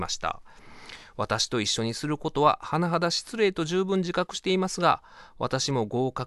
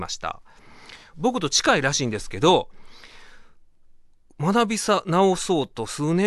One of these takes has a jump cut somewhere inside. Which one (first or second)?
second